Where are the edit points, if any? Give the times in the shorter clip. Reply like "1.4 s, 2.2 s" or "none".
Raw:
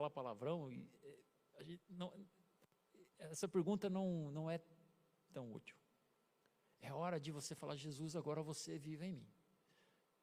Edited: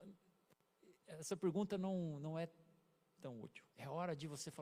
3.7 s